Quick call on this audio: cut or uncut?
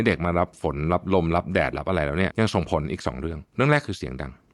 cut